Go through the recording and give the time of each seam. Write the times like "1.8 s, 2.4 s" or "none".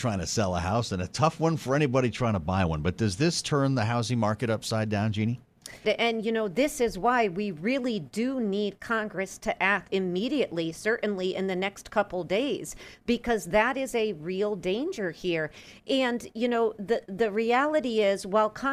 5.8 s, 9.9 s